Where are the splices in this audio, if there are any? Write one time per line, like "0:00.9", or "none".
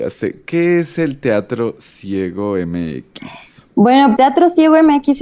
0:04.2